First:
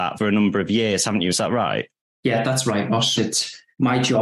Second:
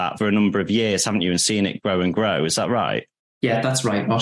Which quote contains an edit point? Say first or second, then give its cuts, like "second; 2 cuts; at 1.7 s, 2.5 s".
first; 2 cuts; at 1.3 s, 3.2 s